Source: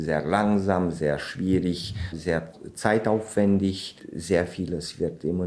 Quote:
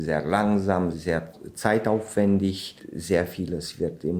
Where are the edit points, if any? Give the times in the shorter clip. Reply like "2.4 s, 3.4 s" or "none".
0.9 s